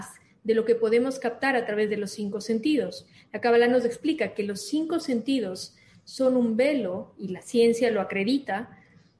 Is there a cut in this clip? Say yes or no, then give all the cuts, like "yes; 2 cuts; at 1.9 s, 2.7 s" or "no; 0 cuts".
no; 0 cuts